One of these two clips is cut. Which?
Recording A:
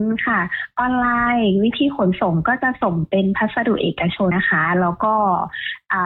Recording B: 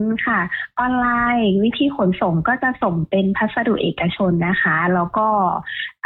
A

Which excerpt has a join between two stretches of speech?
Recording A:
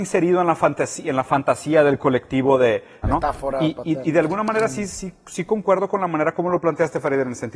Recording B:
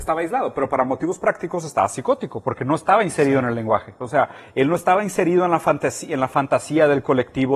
A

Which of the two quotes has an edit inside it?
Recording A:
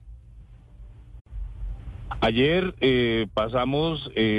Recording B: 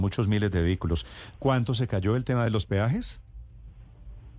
B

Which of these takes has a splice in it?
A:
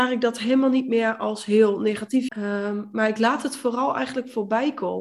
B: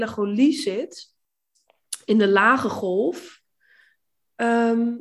A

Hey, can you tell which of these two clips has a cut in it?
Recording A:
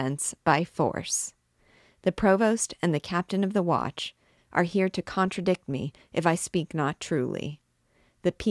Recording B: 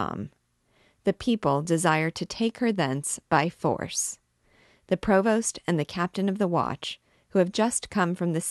A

